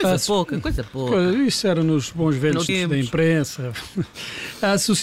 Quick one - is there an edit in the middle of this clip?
yes; 1 cut; at 2.7 s

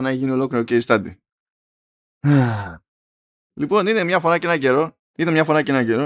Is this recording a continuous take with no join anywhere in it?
yes; 0 cuts

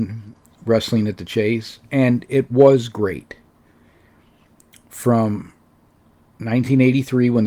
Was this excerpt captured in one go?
yes; 0 cuts

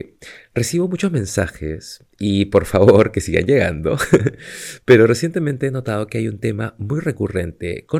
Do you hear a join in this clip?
no; 0 cuts

